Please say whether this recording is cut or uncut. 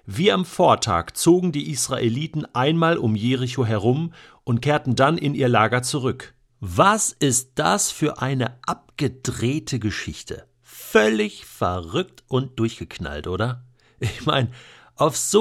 cut